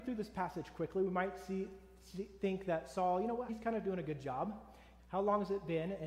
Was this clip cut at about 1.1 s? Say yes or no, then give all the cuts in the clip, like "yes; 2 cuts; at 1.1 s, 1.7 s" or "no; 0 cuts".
no; 2 cuts; at 3.5 s, 5.0 s